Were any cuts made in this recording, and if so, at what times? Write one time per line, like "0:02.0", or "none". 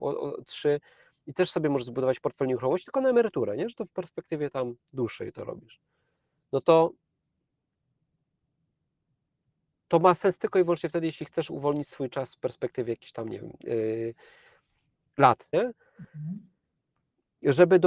0:15.5